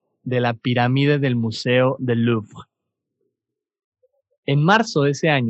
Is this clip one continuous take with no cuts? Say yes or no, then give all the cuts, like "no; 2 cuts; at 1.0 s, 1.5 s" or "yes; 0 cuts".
yes; 0 cuts